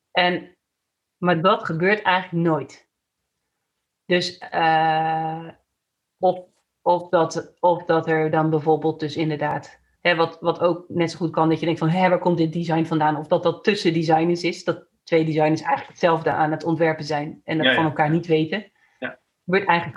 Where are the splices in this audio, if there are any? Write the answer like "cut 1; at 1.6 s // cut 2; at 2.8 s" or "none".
cut 1; at 9.9 s